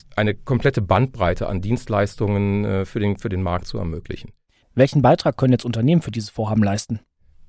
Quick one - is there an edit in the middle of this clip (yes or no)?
yes